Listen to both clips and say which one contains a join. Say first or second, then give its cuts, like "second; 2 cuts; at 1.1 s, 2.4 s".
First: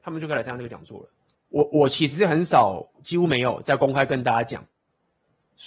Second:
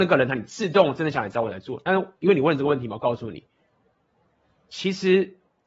first; 2 cuts; at 1.3 s, 2.9 s